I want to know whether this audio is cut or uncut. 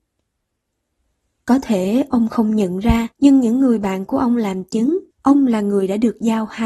cut